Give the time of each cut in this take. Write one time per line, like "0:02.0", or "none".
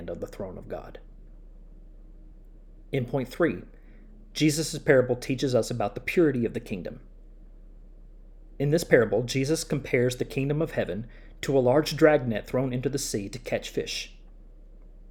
none